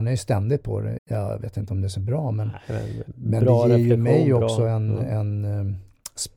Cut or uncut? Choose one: cut